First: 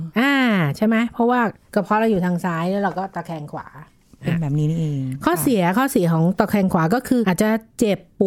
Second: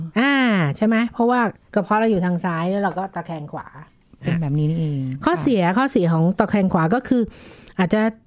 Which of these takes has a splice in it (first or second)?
first